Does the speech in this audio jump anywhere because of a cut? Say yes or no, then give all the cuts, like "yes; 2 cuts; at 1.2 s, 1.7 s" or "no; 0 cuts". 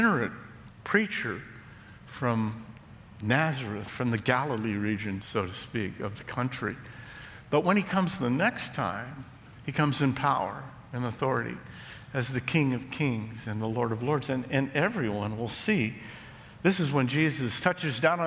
yes; 1 cut; at 5.2 s